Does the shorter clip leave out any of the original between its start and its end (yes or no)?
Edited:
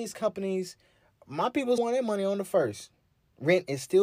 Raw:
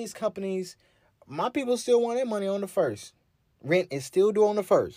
yes